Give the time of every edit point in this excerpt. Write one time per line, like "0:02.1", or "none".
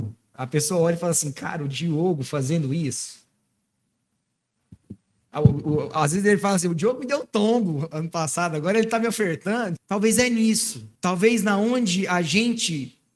0:09.8
0:11.0